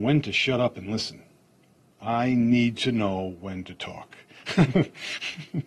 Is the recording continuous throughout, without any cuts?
no; 1 cut; at 1.9 s

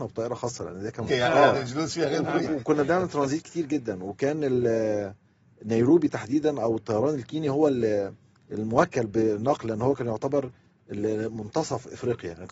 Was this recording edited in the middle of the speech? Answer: yes; 1 cut; at 1.1 s

